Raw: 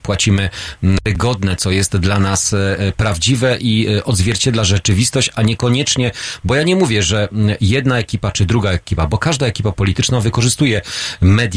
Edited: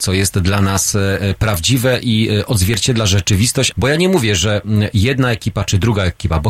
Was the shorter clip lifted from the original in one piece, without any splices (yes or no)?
no